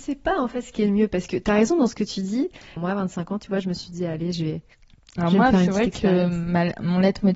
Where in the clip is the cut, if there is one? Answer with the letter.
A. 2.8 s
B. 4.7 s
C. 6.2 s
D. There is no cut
A